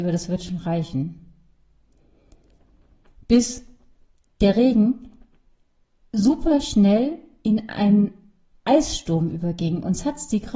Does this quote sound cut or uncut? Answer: uncut